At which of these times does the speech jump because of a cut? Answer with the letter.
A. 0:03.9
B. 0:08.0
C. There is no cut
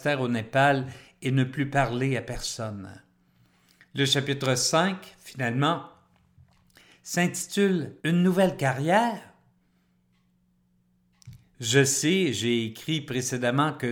B